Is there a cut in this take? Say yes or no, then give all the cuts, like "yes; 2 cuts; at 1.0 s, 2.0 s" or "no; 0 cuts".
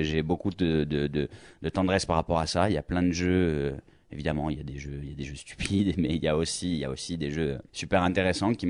yes; 1 cut; at 7.7 s